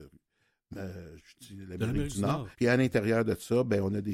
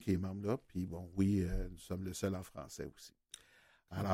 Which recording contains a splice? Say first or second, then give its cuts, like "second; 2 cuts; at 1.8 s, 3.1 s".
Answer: first; 2 cuts; at 1.2 s, 2.5 s